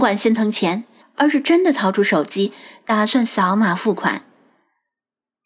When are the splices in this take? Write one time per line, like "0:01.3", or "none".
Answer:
0:01.0